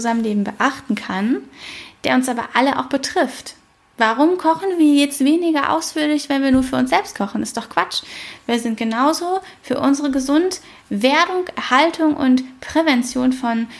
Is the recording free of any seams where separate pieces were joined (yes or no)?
yes